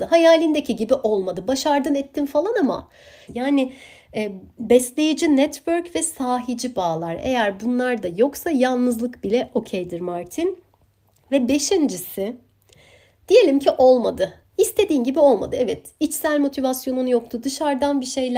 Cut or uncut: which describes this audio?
cut